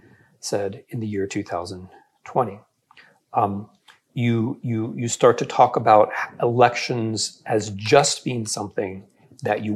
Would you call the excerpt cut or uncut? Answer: uncut